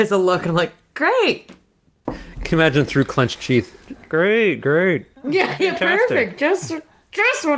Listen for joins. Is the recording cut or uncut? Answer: cut